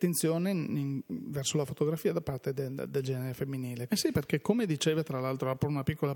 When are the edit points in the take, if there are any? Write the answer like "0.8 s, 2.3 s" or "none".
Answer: 3.9 s